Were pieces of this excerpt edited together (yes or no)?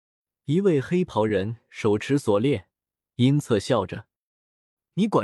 yes